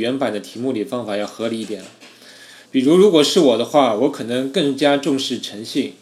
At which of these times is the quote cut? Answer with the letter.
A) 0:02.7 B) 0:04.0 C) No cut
A